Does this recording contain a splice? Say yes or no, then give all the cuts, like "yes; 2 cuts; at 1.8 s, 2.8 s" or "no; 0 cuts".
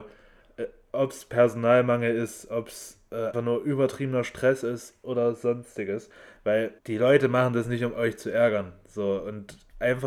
yes; 2 cuts; at 3.3 s, 6.8 s